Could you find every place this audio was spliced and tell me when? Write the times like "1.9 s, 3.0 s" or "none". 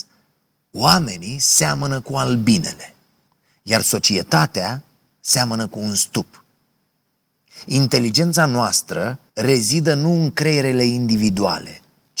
9.3 s